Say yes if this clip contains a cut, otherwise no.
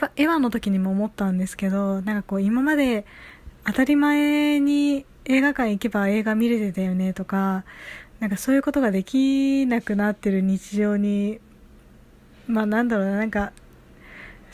yes